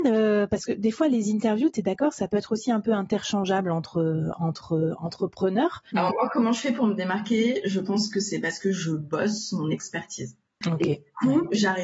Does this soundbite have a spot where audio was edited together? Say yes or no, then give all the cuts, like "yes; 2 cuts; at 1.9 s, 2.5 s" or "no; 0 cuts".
yes; 2 cuts; at 5.9 s, 10.6 s